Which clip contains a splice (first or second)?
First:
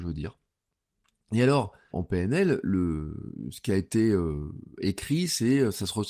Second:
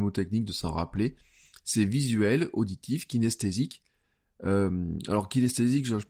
first